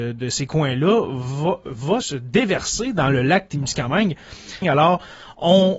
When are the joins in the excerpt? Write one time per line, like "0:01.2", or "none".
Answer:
0:02.0
0:04.6